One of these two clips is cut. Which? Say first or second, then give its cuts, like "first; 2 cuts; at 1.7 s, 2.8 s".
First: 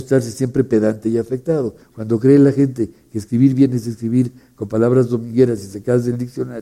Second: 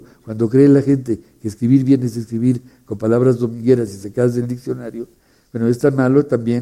first; 1 cut; at 1.8 s